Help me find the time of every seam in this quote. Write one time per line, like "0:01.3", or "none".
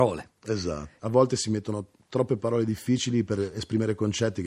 0:01.0